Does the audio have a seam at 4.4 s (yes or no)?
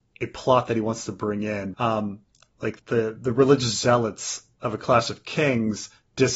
no